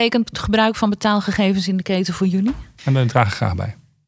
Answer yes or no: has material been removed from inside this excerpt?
yes